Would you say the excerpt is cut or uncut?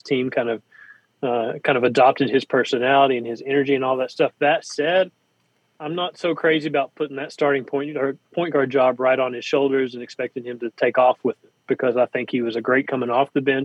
uncut